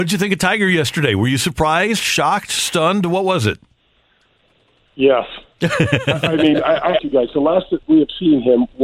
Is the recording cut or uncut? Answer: cut